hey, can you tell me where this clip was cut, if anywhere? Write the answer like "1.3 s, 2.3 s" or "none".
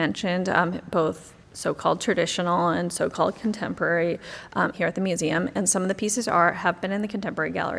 1.4 s, 4.7 s